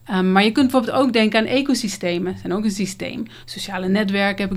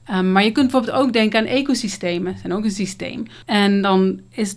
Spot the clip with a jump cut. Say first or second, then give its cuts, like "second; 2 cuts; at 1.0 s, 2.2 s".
second; 1 cut; at 3.4 s